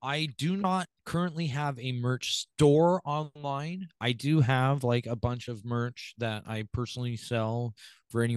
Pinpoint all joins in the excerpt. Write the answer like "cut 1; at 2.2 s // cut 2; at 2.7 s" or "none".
cut 1; at 4.0 s